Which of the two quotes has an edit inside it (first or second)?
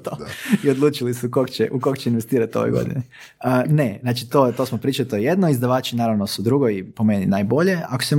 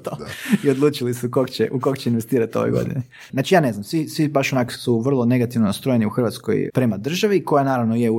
second